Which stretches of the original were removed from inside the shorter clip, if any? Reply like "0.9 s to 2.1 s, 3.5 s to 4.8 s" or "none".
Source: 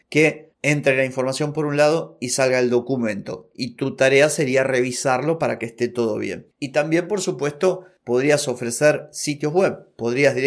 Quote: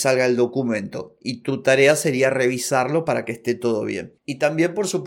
none